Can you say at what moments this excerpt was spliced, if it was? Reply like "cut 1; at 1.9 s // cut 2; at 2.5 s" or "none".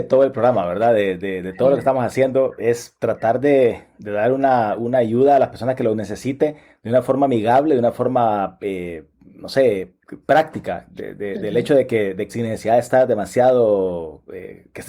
cut 1; at 10.3 s // cut 2; at 12.3 s